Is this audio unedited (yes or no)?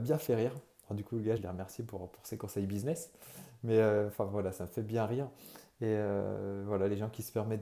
no